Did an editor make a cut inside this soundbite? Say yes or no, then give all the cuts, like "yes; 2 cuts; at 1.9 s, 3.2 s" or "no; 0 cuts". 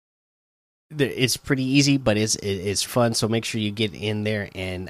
yes; 1 cut; at 2.9 s